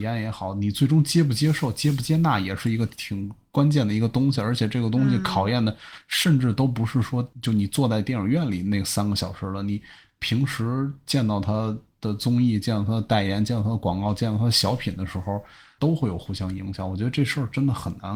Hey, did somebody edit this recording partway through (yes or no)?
yes